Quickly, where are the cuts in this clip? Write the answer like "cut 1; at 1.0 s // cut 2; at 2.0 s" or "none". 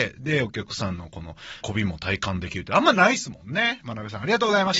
cut 1; at 1.6 s // cut 2; at 3.8 s